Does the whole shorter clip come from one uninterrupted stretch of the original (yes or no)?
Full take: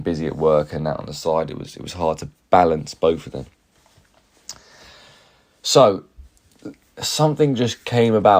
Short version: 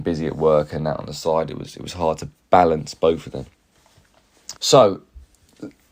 no